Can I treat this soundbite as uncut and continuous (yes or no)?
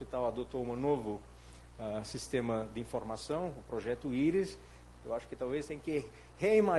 no